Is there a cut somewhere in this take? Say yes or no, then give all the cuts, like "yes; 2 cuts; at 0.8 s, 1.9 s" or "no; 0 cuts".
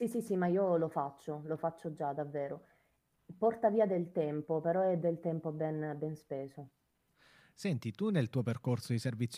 no; 0 cuts